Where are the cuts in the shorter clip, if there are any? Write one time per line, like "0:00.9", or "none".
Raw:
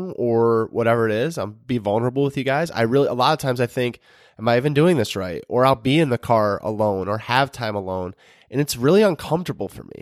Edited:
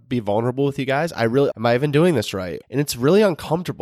0:01.5
0:02.6